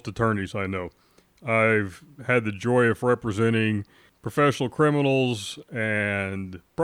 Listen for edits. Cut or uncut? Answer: uncut